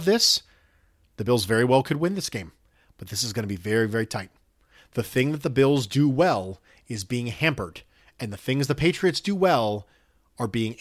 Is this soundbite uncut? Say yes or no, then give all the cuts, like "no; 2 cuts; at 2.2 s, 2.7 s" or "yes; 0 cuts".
no; 1 cut; at 1.0 s